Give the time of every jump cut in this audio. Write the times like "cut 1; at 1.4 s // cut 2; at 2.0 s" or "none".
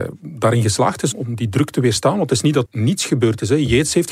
cut 1; at 1.1 s // cut 2; at 2.7 s